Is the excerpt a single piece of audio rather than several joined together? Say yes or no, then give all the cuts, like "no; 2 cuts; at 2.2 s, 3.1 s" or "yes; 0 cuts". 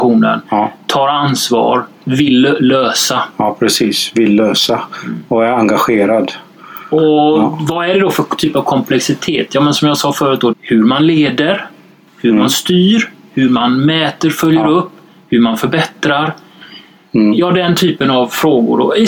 no; 1 cut; at 10.5 s